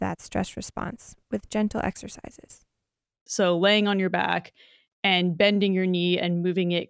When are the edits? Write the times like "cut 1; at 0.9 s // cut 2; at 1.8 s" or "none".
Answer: cut 1; at 3.3 s